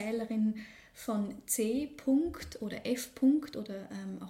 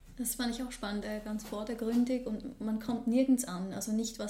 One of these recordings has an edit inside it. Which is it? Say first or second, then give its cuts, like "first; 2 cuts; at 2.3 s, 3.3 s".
second; 1 cut; at 1.0 s